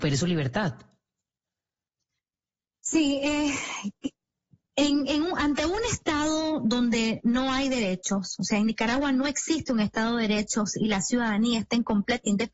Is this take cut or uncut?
uncut